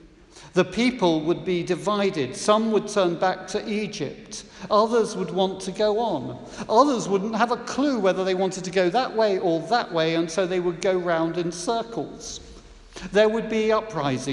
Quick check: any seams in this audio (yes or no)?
no